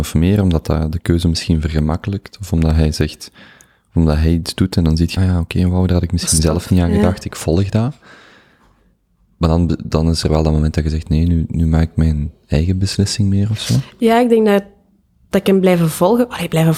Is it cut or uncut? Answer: cut